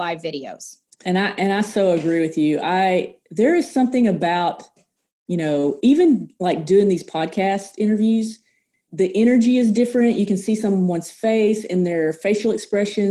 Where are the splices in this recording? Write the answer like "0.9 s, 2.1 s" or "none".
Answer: 1.0 s